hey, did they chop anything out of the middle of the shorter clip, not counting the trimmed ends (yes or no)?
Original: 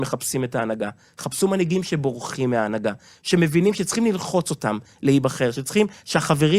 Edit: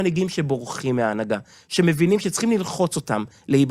no